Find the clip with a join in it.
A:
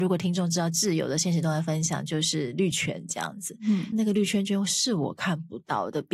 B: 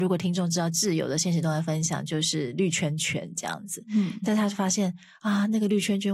A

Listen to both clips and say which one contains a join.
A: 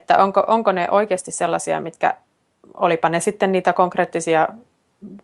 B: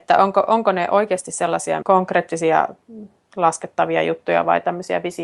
B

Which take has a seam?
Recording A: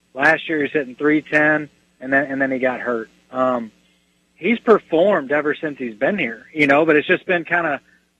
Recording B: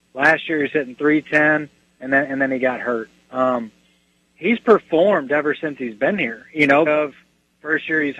B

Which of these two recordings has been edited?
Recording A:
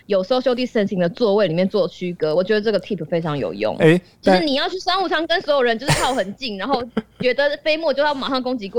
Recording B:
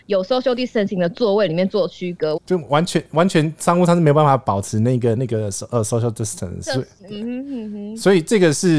B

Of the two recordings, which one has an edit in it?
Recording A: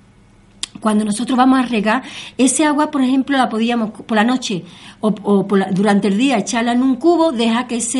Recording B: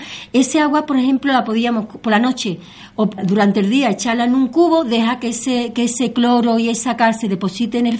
B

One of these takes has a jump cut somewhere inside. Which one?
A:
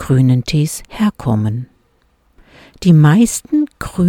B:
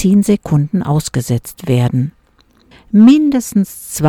B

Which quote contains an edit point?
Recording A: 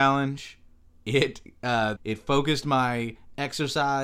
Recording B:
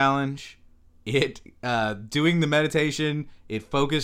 A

